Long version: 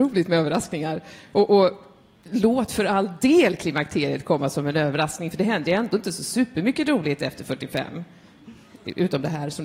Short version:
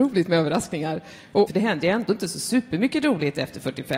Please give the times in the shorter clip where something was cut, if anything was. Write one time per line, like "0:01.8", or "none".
0:01.5